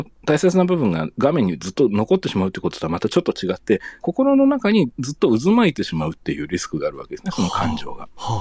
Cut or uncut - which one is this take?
cut